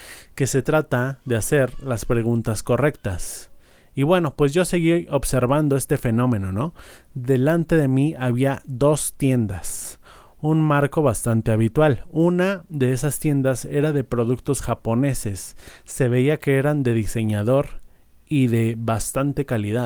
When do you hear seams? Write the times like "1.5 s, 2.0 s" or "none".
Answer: none